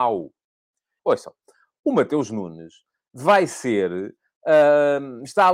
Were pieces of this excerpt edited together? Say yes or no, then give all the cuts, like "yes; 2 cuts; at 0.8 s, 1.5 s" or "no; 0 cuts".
yes; 1 cut; at 1.0 s